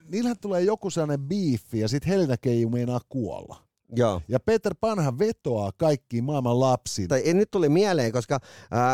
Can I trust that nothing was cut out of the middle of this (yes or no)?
no